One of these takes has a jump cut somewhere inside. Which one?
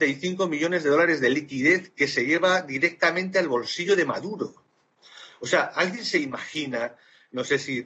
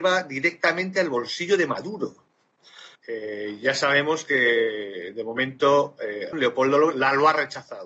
second; 2 cuts; at 3.0 s, 6.3 s

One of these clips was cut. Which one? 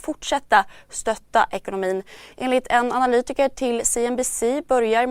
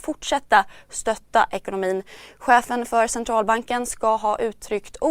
first; 1 cut; at 2.3 s

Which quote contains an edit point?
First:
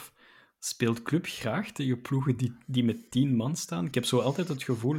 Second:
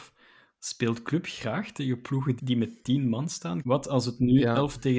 second; 2 cuts; at 2.4 s, 3.6 s

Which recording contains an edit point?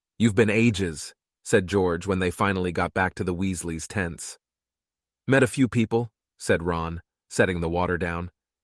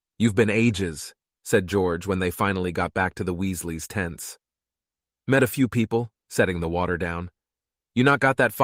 second; 1 cut; at 6.2 s

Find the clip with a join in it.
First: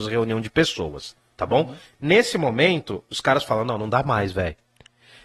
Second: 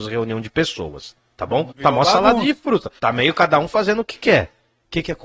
second; 2 cuts; at 1.7 s, 3.0 s

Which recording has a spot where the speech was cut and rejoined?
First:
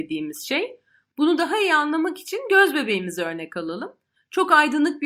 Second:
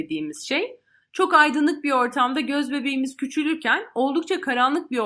second; 1 cut; at 1.0 s

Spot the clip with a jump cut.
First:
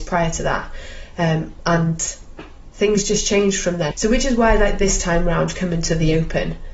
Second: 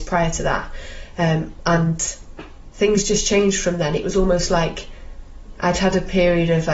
first; 1 cut; at 3.9 s

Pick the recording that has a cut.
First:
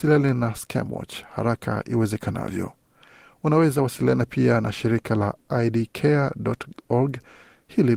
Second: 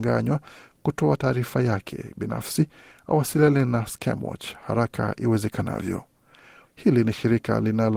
second; 1 cut; at 6.6 s

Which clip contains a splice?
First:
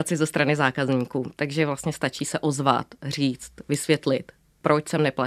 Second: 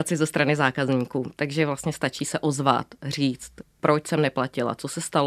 second; 1 cut; at 3.6 s

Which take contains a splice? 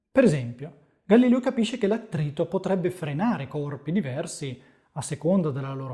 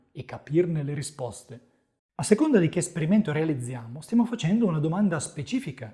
second; 1 cut; at 2.0 s

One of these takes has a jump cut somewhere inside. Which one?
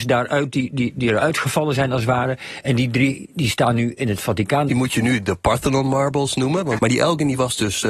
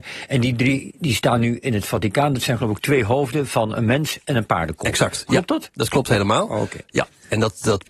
first; 2 cuts; at 4.7 s, 6.8 s

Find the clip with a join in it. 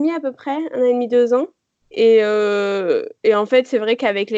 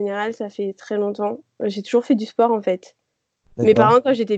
first; 1 cut; at 1.8 s

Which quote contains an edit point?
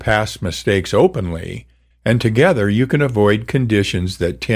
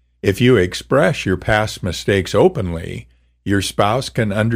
first; 1 cut; at 1.9 s

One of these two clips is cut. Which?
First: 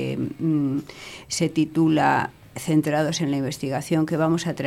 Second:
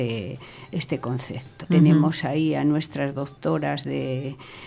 second; 1 cut; at 1.6 s

